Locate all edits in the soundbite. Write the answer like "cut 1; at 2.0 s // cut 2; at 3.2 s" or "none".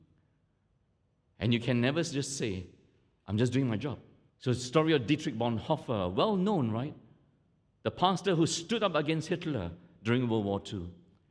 cut 1; at 4.3 s